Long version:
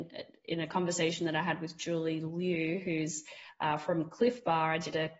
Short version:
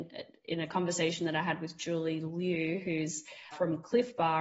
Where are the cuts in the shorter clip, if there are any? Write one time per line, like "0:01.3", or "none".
0:03.5